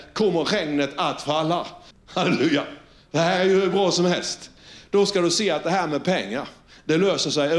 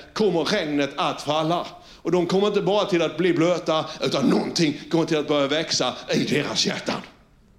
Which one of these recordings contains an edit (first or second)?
first